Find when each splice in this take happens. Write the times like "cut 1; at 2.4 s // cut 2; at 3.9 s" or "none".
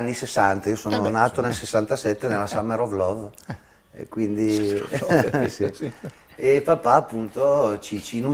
none